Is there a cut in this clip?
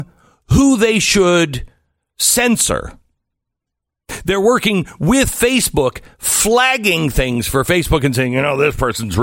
no; 0 cuts

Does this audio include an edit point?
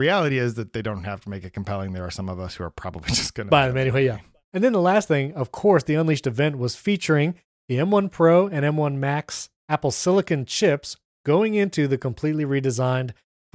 yes; 1 cut; at 3.5 s

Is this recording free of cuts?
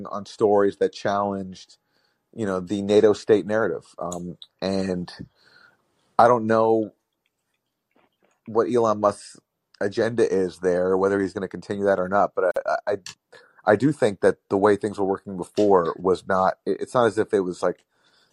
yes; 0 cuts

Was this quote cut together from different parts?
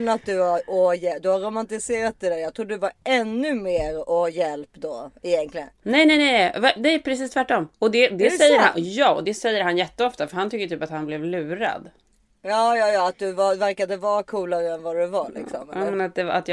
no; 0 cuts

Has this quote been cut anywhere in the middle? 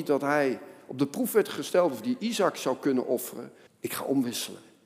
yes; 1 cut; at 3.7 s

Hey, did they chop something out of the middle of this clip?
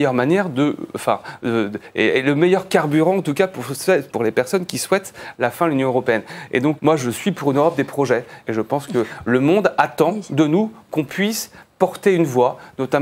yes; 3 cuts; at 4.1 s, 6.8 s, 8.4 s

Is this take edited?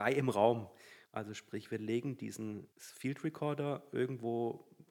yes; 2 cuts; at 1.0 s, 2.7 s

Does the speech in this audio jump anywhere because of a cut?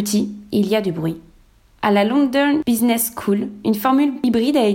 yes; 1 cut; at 1.7 s

